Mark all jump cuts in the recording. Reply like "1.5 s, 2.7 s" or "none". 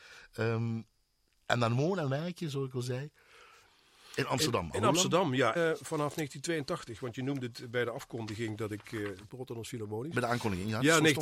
5.6 s, 9.3 s